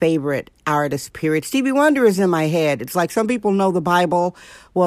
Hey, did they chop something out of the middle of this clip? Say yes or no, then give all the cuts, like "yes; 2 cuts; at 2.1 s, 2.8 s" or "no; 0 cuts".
no; 0 cuts